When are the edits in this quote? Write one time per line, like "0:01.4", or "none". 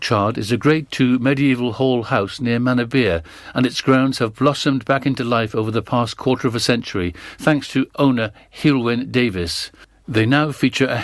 none